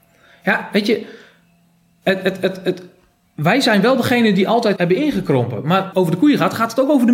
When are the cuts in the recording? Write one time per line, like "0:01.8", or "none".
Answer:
0:04.8
0:05.9

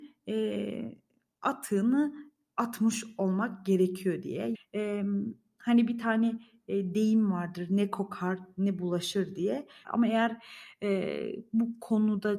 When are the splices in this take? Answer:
0:04.5
0:09.8

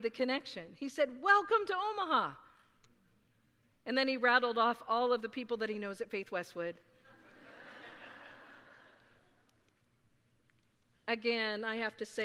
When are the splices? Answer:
none

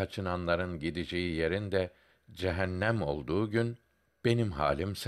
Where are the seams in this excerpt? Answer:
none

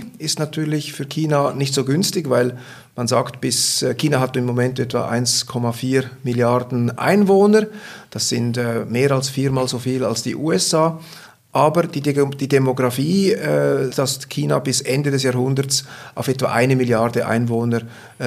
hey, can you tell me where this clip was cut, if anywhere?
0:13.9

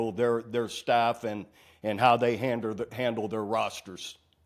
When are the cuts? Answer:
none

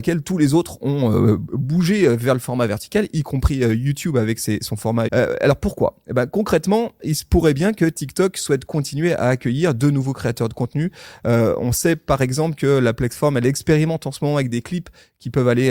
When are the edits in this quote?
0:05.1

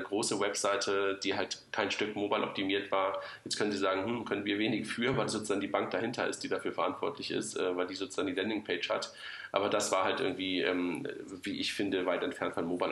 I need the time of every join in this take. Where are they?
none

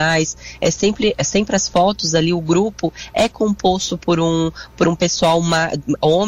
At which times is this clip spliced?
none

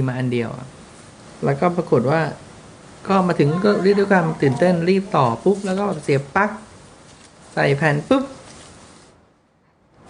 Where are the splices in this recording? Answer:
none

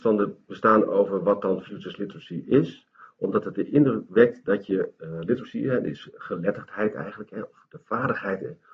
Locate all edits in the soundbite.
none

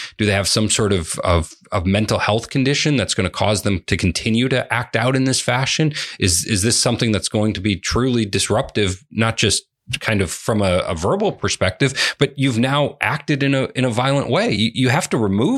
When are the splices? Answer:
none

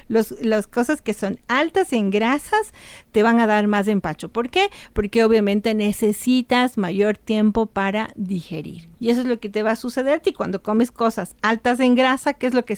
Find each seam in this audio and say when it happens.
0:08.9

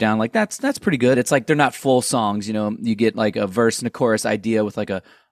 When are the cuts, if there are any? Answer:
0:01.1

